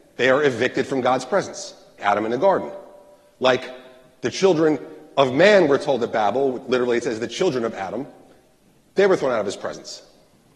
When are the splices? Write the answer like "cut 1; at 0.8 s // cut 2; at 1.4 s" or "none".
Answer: cut 1; at 2.0 s